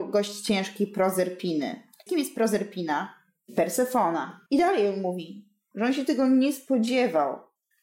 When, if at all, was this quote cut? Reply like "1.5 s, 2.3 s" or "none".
2.1 s, 4.5 s, 5.7 s